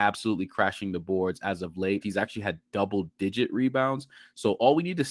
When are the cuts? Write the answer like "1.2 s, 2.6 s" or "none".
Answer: 2.0 s